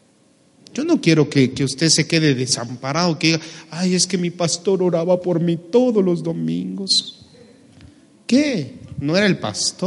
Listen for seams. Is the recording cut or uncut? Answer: uncut